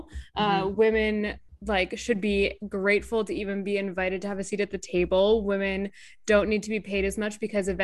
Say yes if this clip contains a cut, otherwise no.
no